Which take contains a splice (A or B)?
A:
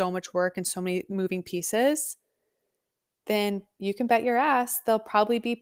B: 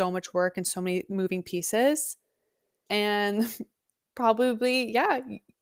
B